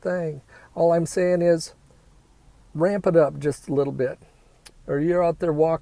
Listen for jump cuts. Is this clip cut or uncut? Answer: cut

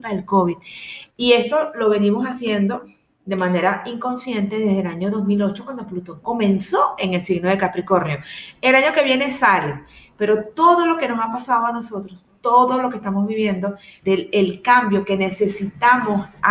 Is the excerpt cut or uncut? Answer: cut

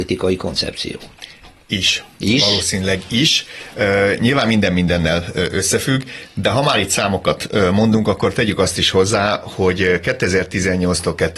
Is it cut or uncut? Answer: uncut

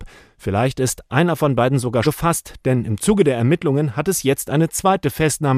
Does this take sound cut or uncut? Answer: cut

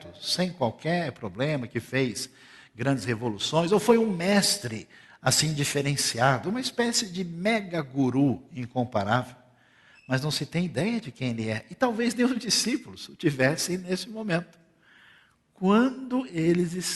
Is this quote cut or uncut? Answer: uncut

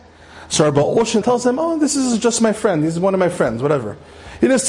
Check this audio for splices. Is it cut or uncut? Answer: cut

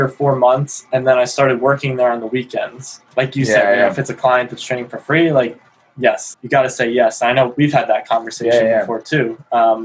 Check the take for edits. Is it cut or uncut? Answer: cut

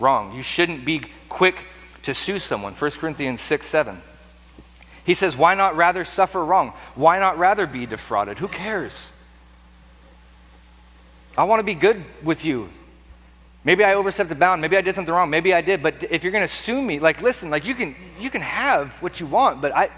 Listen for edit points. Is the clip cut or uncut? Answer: uncut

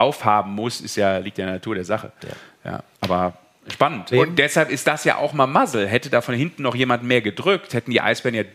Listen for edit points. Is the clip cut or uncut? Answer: cut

